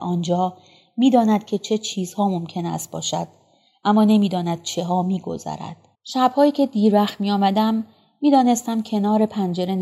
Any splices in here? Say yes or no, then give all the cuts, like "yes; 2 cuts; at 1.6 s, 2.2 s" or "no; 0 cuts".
yes; 1 cut; at 5.9 s